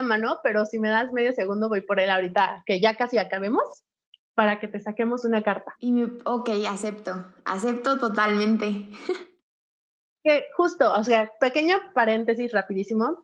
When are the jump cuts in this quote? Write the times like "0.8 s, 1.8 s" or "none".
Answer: none